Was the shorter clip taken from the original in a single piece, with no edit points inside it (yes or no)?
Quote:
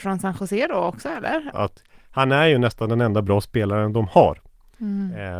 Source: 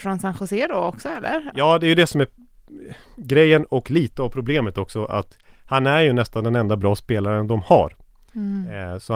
no